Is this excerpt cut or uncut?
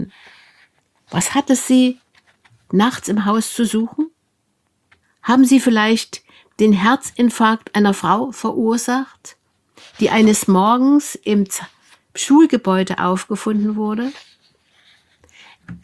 cut